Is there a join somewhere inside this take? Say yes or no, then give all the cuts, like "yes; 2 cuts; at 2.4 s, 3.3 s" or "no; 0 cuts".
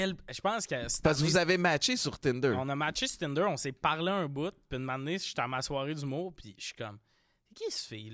no; 0 cuts